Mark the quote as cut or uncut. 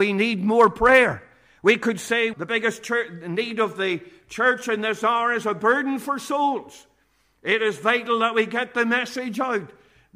cut